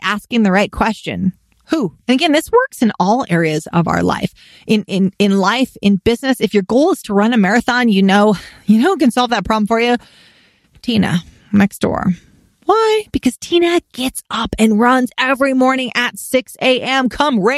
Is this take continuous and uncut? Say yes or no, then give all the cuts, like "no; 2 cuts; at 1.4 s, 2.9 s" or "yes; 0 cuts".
yes; 0 cuts